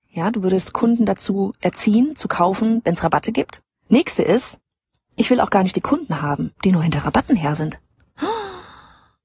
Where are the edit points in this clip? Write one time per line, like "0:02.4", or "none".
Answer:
0:03.9
0:06.5